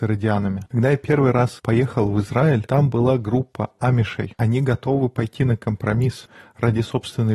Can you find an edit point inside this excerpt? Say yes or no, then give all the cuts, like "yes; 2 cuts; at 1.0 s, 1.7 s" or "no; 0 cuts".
yes; 1 cut; at 4.3 s